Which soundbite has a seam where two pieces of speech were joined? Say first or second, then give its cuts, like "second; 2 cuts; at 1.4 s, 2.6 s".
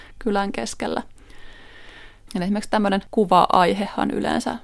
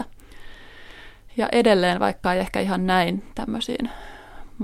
first; 1 cut; at 2.3 s